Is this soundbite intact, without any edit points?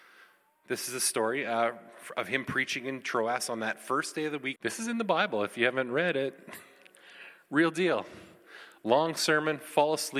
no; 1 cut; at 4.6 s

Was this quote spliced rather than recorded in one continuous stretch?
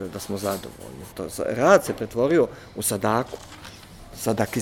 yes; 1 cut; at 1.1 s

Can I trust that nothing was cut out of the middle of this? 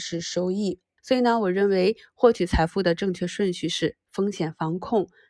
no; 1 cut; at 1.0 s

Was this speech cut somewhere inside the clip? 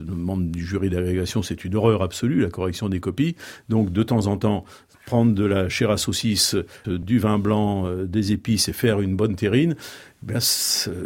yes; 1 cut; at 6.8 s

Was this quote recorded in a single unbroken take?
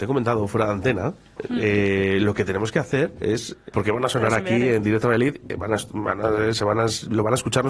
no; 1 cut; at 3.7 s

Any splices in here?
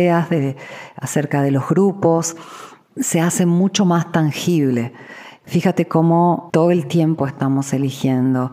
yes; 1 cut; at 5.4 s

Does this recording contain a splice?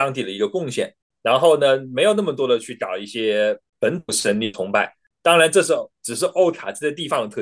no; 0 cuts

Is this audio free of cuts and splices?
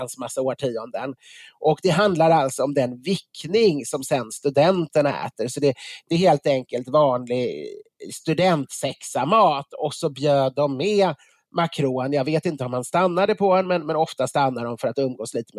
yes; 0 cuts

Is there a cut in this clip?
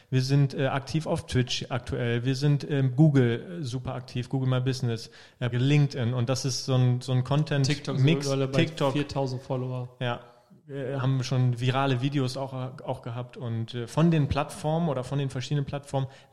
yes; 1 cut; at 5.5 s

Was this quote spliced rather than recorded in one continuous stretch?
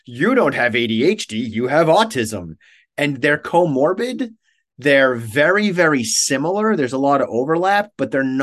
no; 0 cuts

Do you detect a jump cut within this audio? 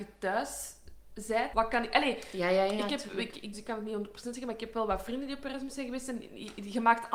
yes; 2 cuts; at 1.5 s, 3.5 s

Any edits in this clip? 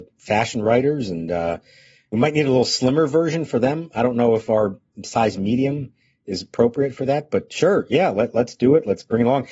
no; 0 cuts

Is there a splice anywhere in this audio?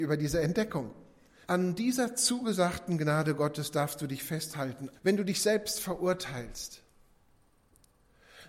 yes; 2 cuts; at 1.4 s, 4.9 s

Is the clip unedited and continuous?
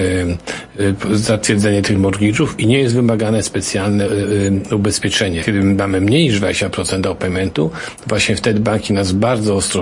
no; 1 cut; at 5.4 s

